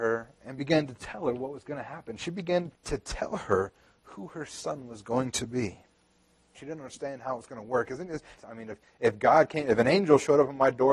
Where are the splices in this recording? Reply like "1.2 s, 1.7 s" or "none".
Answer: 2.7 s, 6.5 s, 8.4 s